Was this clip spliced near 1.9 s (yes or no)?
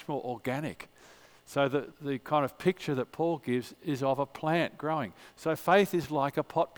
yes